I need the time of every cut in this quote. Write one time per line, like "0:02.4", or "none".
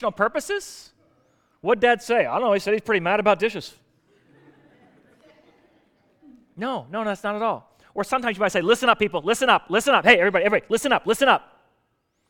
none

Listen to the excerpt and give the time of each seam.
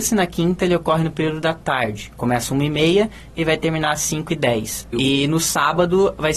0:04.9

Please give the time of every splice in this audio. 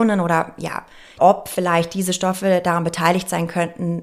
0:01.2

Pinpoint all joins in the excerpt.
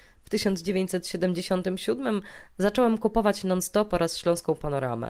none

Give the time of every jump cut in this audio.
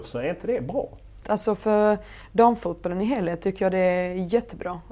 0:01.2

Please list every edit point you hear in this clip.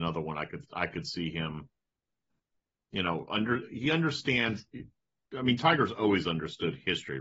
none

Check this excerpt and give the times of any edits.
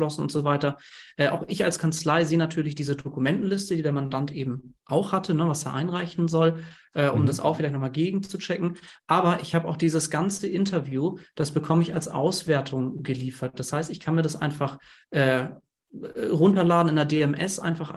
none

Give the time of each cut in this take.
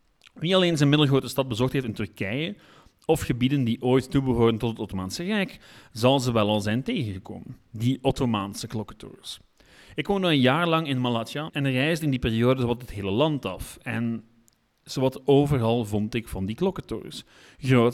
0:11.5

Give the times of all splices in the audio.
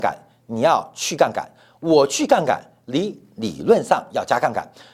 none

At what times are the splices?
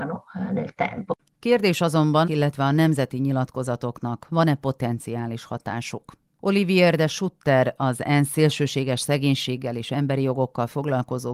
0:02.2

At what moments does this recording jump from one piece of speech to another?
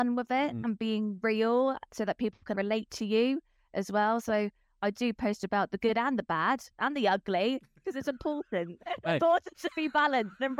0:02.5

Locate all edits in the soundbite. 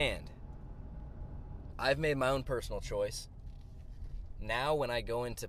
0:01.7

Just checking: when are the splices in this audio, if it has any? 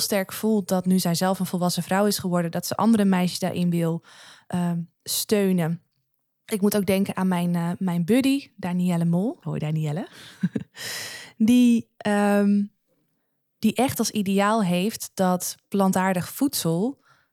0:09.4

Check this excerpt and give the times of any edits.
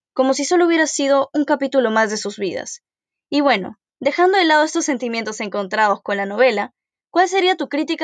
none

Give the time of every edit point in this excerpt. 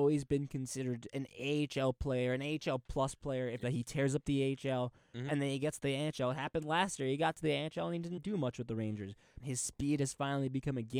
0:03.6
0:08.2
0:09.4

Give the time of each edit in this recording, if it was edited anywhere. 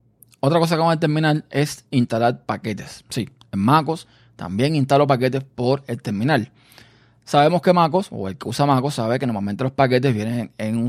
none

